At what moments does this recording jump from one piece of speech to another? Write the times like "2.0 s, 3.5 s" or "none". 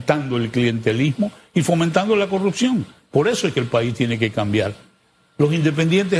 none